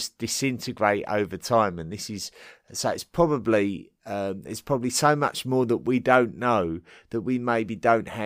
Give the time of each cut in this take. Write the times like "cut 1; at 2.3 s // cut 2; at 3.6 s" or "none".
none